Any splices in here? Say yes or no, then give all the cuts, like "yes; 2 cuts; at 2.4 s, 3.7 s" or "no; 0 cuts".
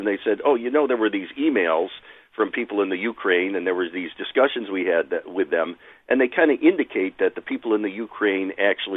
no; 0 cuts